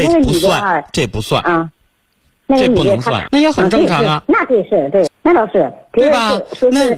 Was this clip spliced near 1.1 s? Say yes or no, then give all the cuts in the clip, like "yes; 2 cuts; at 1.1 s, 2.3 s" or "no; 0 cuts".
no; 2 cuts; at 3.3 s, 5.1 s